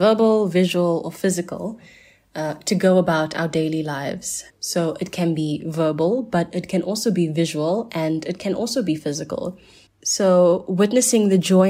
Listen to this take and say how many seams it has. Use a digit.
2